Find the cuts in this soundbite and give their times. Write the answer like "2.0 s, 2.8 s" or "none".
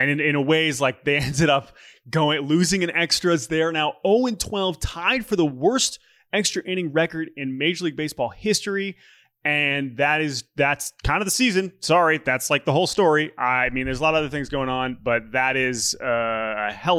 none